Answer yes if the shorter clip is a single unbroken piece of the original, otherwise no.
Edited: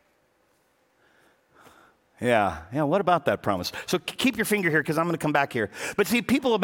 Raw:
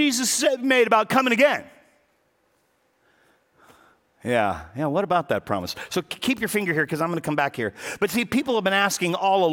yes